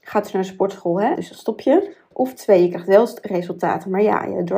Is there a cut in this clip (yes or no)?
yes